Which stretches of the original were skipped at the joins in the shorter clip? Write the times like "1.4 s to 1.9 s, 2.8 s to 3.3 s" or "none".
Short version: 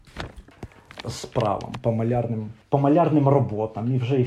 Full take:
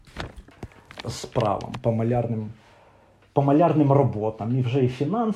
2.6 s to 3.3 s